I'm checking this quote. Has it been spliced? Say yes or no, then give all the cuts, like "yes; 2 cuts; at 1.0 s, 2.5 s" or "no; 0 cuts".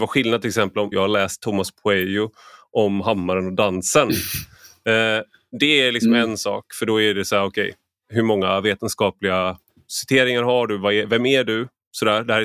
yes; 1 cut; at 0.9 s